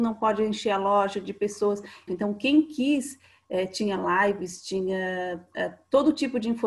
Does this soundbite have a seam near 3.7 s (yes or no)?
no